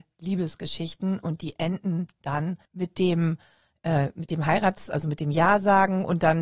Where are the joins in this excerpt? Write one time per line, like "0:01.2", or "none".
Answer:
0:02.7